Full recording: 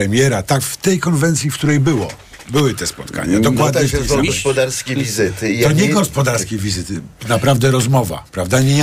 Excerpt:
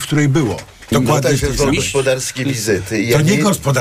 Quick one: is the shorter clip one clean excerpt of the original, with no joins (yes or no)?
no